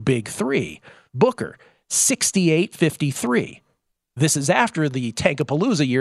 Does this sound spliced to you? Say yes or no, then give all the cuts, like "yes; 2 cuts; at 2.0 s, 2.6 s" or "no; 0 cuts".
yes; 2 cuts; at 1.1 s, 2.7 s